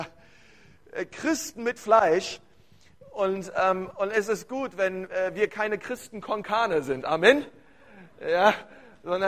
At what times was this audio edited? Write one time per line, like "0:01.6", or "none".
none